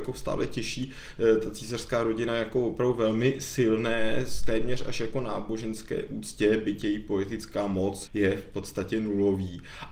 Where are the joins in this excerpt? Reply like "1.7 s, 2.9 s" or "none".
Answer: 8.1 s